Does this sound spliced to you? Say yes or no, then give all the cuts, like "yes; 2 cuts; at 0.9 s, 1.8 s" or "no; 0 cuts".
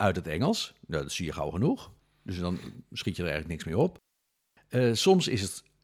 no; 0 cuts